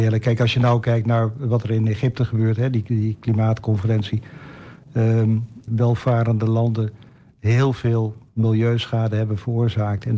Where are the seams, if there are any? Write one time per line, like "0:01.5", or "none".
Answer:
0:05.7